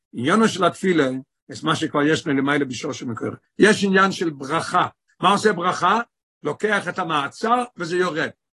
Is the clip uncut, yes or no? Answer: no